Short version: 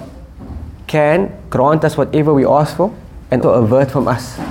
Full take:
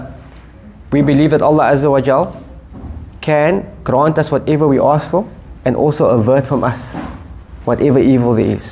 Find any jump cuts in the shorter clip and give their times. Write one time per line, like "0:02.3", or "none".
0:03.4